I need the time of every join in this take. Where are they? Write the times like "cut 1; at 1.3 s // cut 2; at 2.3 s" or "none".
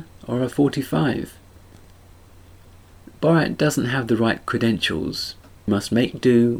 cut 1; at 5.7 s